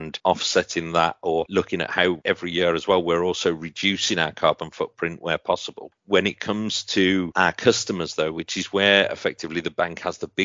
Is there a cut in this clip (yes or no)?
no